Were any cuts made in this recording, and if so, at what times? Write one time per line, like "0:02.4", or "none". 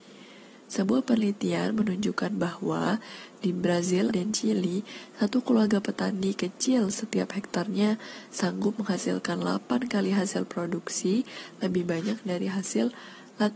0:04.1